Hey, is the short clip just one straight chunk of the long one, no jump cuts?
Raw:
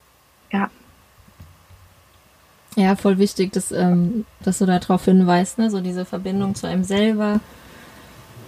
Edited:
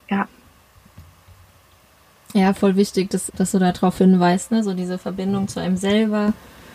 no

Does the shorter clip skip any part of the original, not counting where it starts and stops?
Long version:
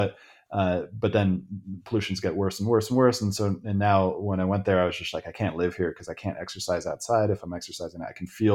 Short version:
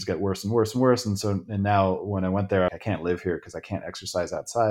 yes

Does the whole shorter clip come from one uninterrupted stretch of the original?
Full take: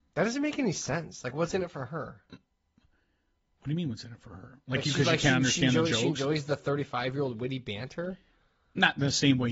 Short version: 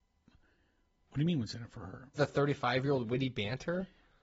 no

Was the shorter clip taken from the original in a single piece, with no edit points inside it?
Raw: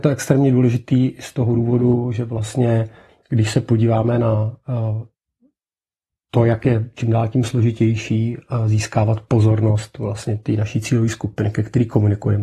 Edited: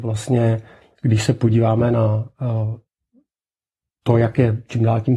yes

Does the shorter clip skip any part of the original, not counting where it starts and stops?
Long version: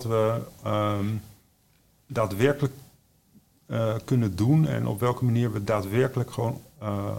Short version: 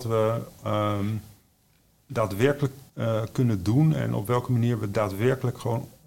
yes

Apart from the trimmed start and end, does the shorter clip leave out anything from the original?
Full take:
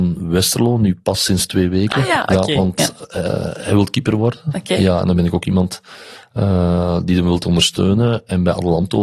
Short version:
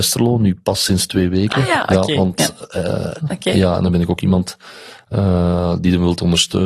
yes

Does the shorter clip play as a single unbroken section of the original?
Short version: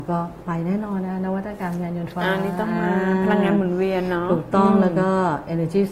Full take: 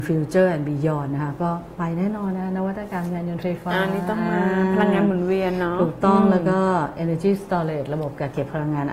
no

